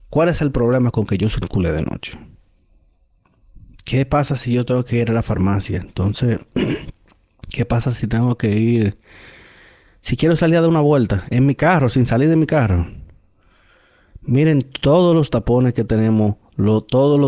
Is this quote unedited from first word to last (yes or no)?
yes